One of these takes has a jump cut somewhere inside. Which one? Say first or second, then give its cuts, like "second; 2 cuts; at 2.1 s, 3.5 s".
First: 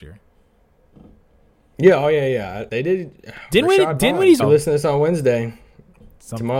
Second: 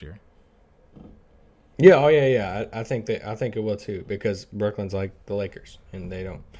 first; 2 cuts; at 2.7 s, 4.4 s